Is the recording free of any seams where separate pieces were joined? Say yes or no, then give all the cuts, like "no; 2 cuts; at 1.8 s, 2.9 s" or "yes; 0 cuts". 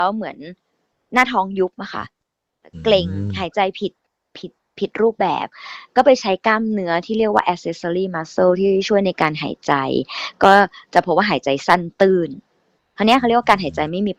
yes; 0 cuts